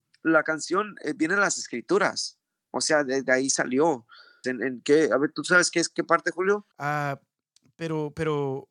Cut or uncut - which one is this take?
cut